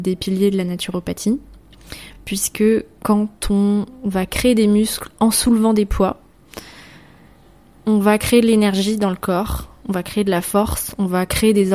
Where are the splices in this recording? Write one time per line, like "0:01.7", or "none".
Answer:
none